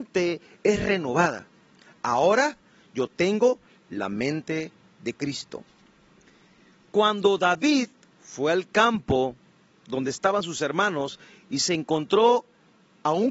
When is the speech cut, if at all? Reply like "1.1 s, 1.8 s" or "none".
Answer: none